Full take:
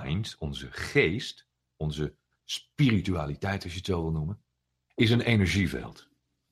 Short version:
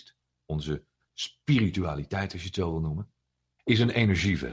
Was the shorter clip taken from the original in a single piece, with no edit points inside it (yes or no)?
yes